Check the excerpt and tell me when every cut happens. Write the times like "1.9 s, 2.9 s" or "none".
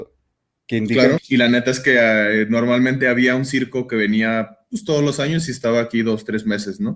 1.2 s